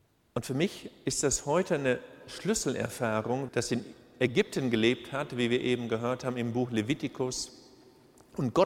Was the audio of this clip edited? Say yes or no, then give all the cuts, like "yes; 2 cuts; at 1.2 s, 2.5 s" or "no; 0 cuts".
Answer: yes; 1 cut; at 3.5 s